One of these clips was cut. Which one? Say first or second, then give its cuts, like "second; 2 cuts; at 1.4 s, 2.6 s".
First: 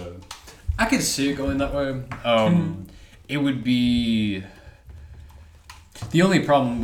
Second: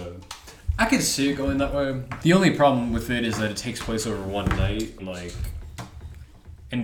second; 2 cuts; at 2.2 s, 5.0 s